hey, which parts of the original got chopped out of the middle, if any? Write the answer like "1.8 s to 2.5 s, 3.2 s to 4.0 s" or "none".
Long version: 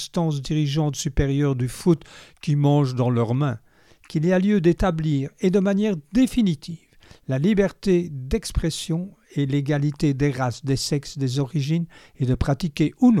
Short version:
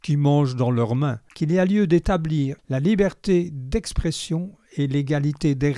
3.7 s to 4.0 s, 5.3 s to 7.2 s